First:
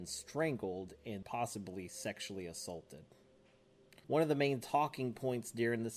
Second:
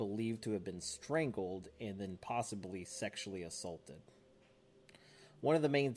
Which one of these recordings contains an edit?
first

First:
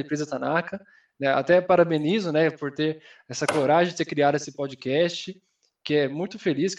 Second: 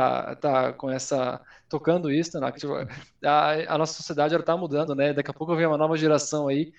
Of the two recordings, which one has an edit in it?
second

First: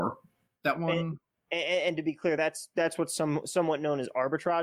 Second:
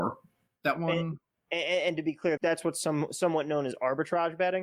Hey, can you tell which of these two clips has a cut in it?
second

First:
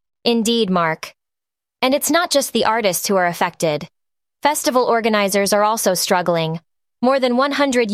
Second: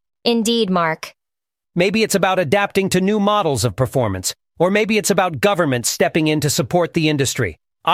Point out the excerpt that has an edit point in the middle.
second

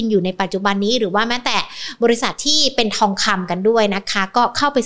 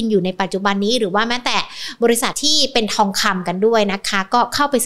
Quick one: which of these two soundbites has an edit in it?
second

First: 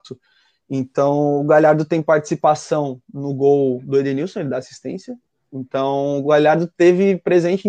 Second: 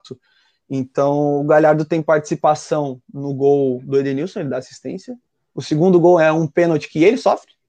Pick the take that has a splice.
first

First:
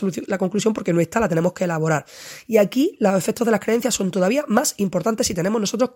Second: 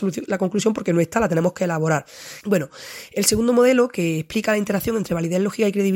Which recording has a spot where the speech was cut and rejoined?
second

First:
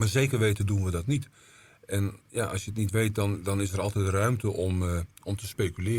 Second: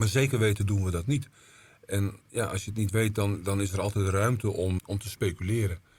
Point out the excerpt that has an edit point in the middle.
second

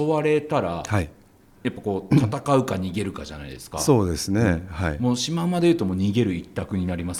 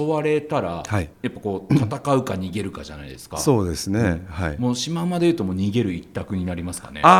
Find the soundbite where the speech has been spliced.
second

